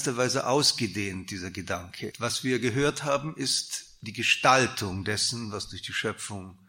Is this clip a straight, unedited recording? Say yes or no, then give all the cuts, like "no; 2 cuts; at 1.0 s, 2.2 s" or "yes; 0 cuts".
no; 1 cut; at 2.1 s